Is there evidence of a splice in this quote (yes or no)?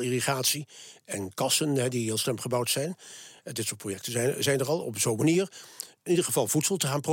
no